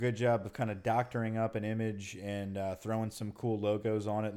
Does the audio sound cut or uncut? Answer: uncut